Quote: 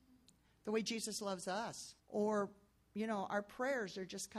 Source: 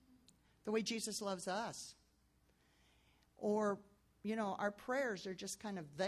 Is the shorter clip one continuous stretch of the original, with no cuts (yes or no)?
no